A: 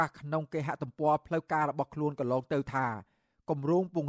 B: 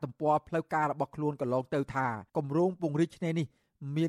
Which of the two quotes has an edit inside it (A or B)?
B